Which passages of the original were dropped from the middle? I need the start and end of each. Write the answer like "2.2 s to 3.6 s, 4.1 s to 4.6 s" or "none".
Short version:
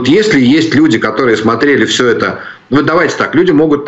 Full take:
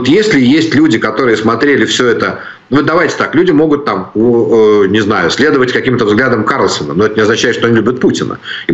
none